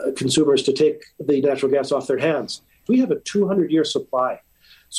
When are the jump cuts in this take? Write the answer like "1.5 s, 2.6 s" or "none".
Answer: 2.9 s